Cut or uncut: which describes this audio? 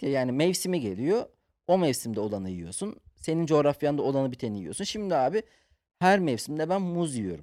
uncut